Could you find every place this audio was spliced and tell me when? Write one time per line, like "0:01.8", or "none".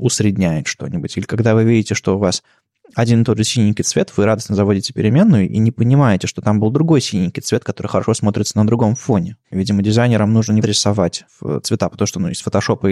0:09.5
0:10.6